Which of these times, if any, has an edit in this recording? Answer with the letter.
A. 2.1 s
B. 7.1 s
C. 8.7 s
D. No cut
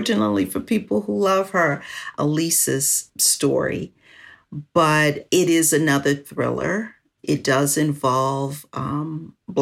A